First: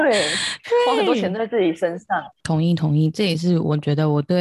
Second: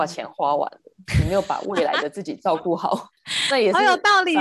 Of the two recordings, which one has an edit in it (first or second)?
first